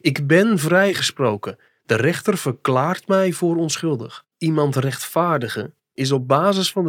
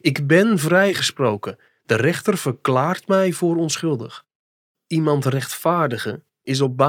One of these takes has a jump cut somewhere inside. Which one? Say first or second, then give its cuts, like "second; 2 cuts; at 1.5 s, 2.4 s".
first; 1 cut; at 4.3 s